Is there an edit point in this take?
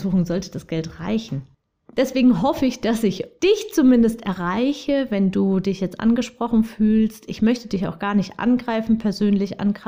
no; 0 cuts

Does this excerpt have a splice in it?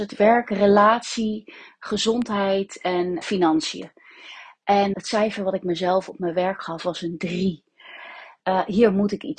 yes; 3 cuts; at 3.2 s, 4.9 s, 8.4 s

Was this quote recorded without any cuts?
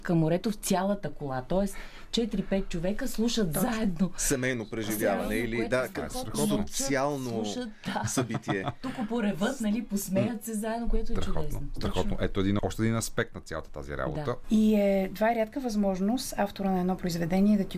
no; 2 cuts; at 12.6 s, 14.4 s

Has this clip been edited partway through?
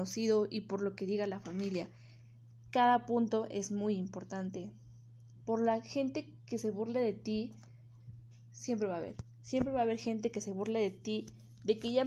no; 0 cuts

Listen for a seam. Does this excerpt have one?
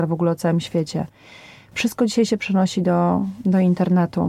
no; 0 cuts

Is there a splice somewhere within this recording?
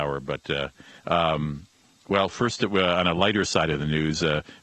yes; 1 cut; at 1.0 s

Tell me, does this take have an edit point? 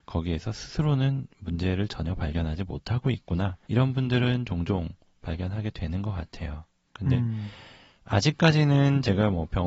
yes; 1 cut; at 3.6 s

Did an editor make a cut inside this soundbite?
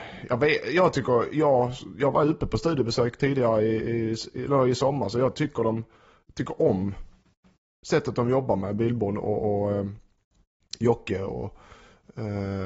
no; 0 cuts

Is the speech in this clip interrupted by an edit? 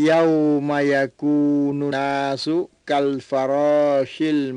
yes; 1 cut; at 1.9 s

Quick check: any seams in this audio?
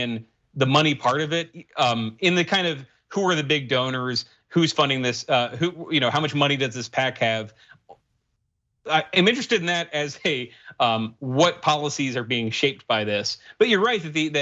no; 0 cuts

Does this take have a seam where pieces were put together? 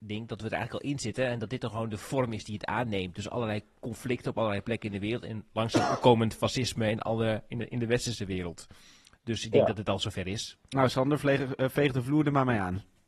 no; 0 cuts

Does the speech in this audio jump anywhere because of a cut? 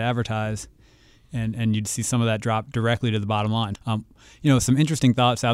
yes; 1 cut; at 3.8 s

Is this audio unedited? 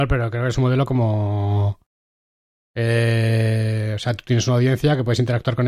no; 1 cut; at 2.6 s

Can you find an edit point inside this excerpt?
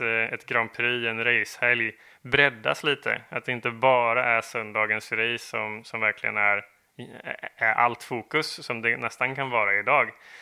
no; 0 cuts

